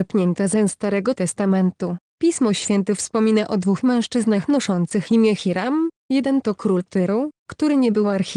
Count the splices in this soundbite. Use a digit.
1